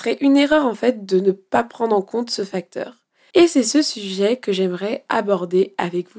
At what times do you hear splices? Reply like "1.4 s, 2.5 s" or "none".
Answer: 3.3 s